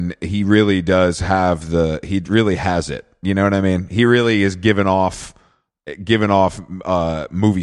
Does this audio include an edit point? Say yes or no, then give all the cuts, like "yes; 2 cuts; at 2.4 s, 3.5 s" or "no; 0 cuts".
no; 0 cuts